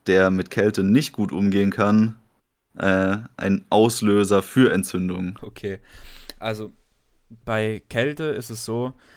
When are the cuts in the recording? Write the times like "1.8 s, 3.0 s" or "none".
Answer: 5.4 s, 7.4 s

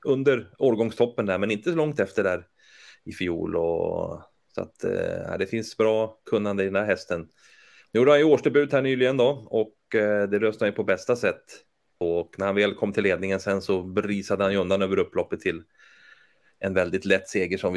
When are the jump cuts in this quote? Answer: 12.0 s

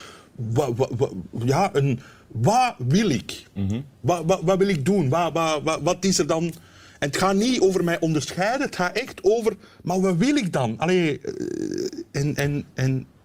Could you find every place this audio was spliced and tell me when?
none

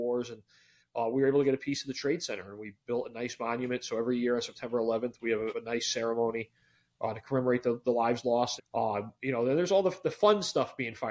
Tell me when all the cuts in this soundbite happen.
5.5 s, 8.6 s

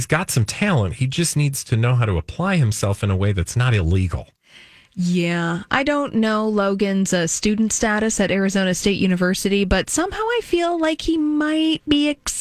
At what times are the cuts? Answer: none

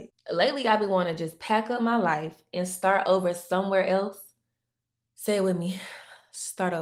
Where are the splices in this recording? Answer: 5.0 s

